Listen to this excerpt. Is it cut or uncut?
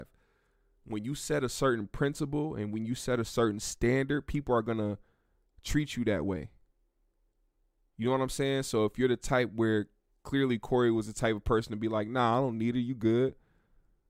uncut